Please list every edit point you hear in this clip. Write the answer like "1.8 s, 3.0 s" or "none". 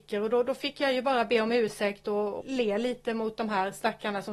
2.4 s